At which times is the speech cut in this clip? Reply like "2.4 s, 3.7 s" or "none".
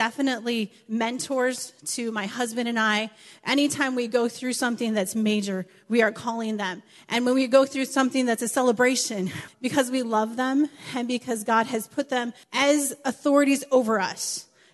9.5 s, 12.4 s